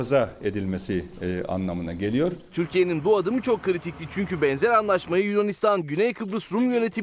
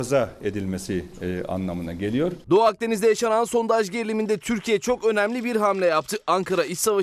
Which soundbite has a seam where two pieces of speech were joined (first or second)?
second